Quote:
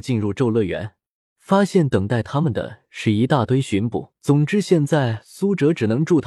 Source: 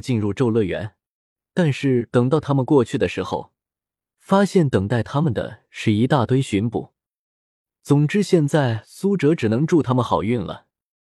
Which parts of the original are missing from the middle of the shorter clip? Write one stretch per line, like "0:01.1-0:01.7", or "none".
0:01.3-0:04.1
0:07.0-0:07.8